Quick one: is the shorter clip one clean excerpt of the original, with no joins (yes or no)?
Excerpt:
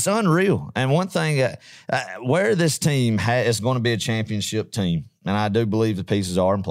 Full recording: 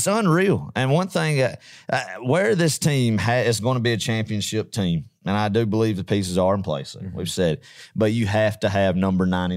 yes